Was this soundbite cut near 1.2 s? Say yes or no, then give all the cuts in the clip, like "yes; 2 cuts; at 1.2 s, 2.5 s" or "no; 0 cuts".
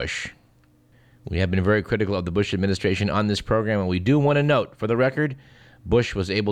no; 0 cuts